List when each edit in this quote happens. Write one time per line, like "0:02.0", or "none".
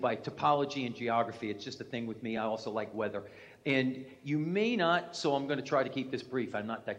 none